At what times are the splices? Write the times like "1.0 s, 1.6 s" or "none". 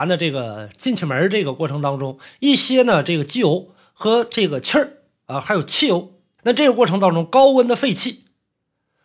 6.4 s